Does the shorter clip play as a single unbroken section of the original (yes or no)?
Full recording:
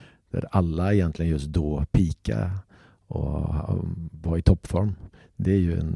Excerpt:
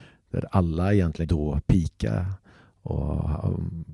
no